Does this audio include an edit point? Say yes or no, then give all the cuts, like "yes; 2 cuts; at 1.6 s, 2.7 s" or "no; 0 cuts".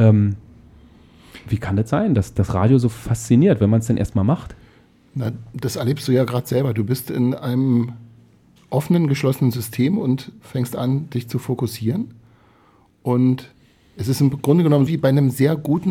yes; 1 cut; at 14.9 s